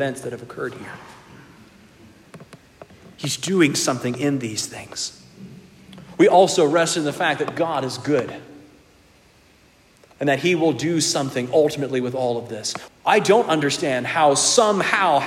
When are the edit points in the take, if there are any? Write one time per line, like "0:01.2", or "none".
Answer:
0:12.9